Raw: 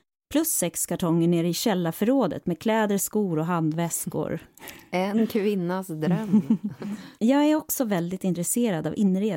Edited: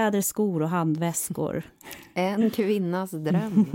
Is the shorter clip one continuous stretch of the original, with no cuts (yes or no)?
yes